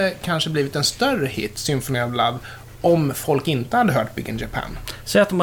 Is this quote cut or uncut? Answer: uncut